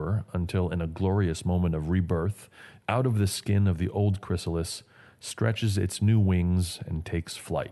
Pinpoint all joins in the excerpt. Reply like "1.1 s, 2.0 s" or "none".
2.8 s